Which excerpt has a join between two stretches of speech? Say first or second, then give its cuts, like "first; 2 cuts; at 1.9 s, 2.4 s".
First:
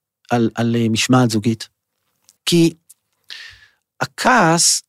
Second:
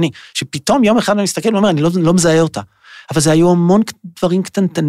first; 1 cut; at 2.4 s